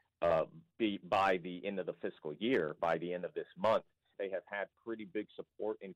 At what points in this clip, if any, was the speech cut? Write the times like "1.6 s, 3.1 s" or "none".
4.1 s